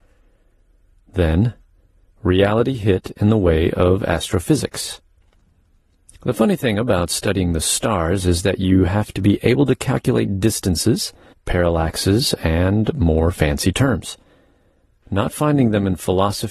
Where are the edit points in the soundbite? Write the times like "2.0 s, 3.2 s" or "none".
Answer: 11.3 s, 15.0 s